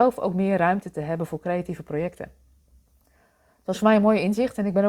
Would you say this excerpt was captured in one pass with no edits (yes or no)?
yes